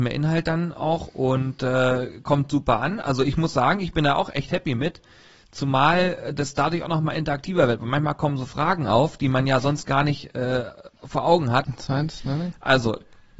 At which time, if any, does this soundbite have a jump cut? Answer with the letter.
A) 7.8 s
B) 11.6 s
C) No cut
B